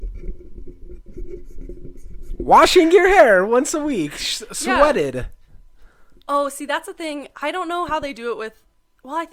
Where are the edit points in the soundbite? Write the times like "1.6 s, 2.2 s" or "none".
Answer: none